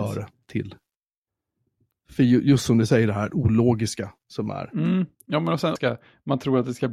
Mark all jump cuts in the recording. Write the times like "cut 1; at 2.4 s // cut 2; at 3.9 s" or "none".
cut 1; at 5.8 s